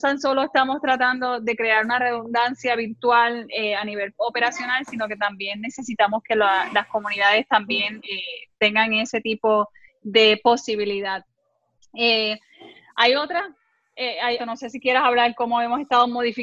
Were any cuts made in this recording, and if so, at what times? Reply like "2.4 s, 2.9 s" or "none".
8.0 s, 14.4 s